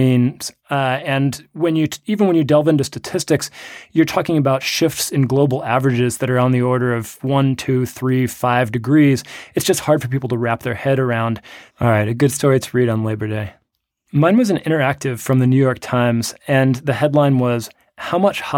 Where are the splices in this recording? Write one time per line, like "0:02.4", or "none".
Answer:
0:11.7
0:13.9